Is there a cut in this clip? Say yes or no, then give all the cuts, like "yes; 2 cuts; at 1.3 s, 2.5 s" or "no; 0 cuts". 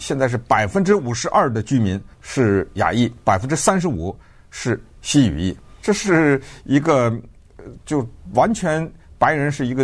yes; 2 cuts; at 2.1 s, 5.8 s